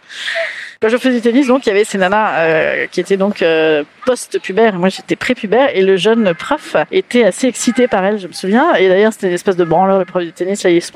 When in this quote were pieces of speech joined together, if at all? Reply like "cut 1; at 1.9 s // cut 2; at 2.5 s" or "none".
none